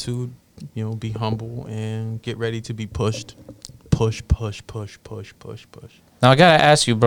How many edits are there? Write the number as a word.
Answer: one